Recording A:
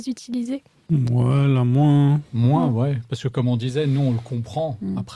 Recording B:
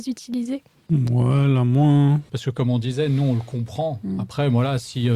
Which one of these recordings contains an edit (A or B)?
B